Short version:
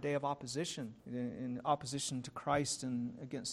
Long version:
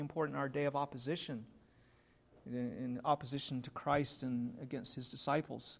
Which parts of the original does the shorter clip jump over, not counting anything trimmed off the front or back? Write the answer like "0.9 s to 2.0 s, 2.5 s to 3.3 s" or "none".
1.5 s to 2.4 s